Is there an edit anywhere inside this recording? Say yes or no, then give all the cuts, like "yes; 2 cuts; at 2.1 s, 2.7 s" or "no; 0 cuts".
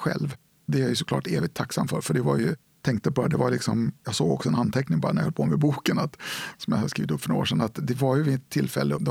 no; 0 cuts